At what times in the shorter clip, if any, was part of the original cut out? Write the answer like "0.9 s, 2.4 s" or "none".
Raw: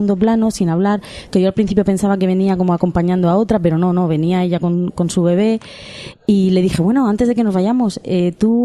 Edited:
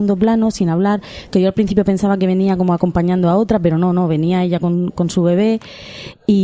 none